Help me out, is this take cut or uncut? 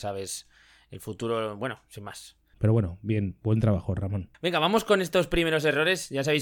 cut